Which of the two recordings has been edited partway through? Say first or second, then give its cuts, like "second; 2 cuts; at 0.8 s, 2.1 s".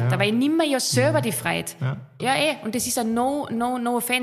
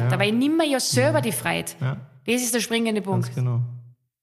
first; 1 cut; at 2.2 s